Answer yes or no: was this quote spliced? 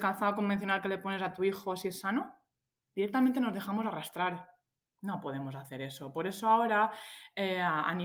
yes